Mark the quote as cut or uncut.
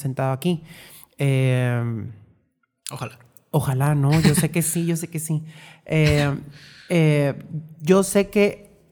uncut